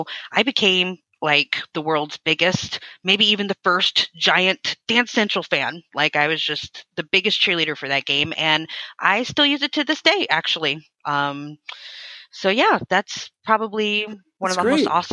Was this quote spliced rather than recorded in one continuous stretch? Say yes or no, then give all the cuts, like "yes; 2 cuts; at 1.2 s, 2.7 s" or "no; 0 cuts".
no; 0 cuts